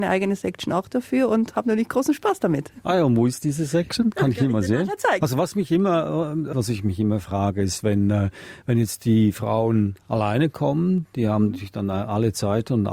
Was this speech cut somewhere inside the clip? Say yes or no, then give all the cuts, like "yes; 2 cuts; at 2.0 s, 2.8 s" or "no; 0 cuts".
yes; 2 cuts; at 5.2 s, 6.5 s